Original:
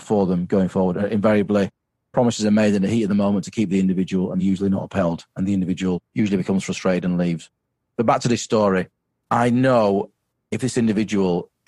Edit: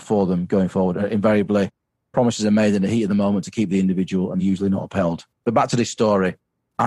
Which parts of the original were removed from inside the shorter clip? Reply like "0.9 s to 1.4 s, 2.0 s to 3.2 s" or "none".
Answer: 5.3 s to 7.8 s